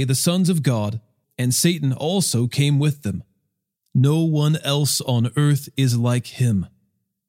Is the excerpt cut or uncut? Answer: cut